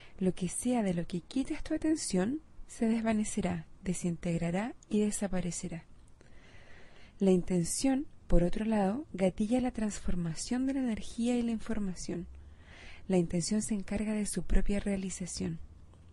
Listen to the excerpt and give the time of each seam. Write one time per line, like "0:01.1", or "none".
none